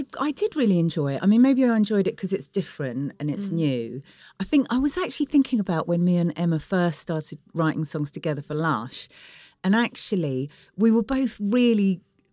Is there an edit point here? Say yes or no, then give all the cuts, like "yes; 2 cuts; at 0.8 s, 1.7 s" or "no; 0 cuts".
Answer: no; 0 cuts